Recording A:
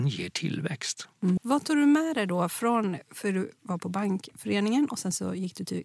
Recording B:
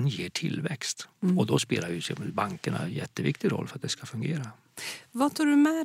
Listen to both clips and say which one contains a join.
A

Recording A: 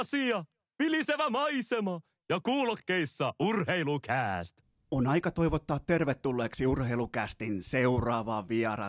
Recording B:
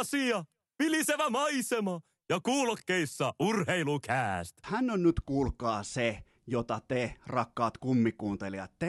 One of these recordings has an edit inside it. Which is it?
B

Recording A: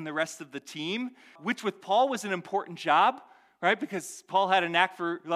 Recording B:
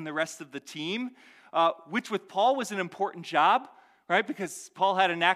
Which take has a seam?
A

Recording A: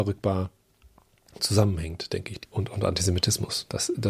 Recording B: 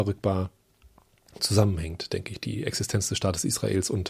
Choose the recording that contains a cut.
A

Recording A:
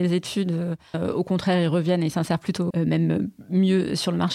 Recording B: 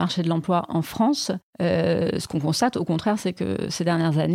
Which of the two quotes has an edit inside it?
A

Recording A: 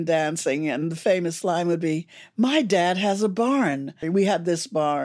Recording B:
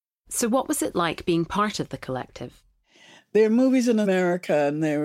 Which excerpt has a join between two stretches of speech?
A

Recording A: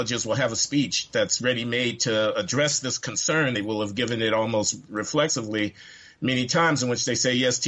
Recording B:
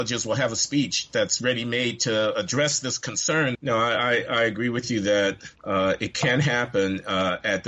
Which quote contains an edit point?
B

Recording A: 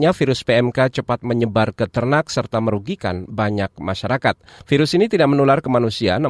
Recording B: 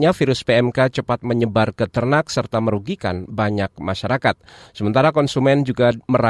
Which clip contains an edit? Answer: A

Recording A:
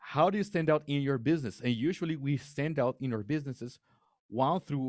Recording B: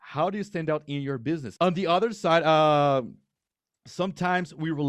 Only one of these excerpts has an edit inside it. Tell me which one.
B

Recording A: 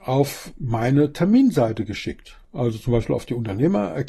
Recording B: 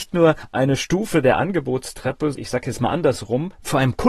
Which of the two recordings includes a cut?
B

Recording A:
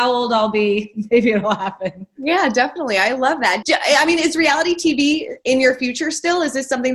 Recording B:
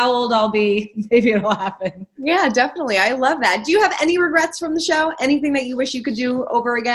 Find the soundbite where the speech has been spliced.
A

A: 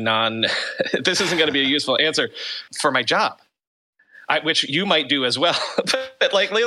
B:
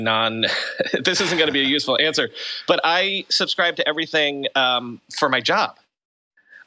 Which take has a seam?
A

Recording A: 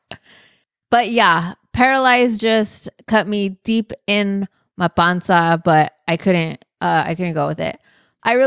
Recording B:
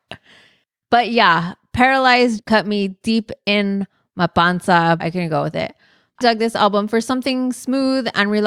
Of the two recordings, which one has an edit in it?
B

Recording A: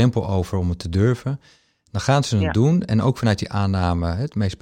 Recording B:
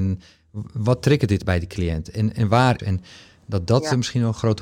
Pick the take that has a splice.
B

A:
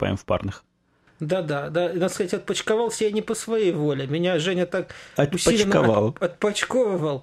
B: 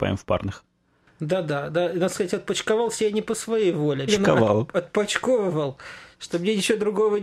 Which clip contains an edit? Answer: B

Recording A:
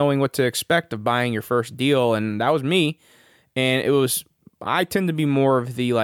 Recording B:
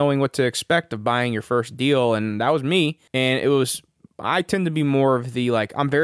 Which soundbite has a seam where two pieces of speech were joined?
B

